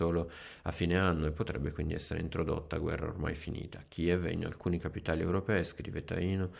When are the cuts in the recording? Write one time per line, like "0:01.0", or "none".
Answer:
none